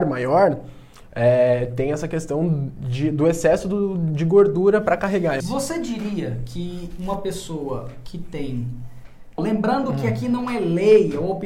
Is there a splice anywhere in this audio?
yes; 2 cuts; at 5.4 s, 9.4 s

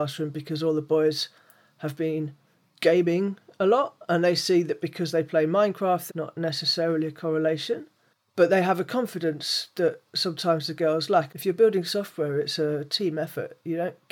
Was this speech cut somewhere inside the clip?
yes; 2 cuts; at 6.1 s, 11.3 s

